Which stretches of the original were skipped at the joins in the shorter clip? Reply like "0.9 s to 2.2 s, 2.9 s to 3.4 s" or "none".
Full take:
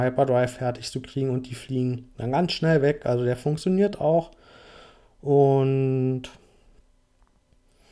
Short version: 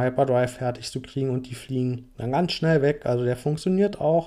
none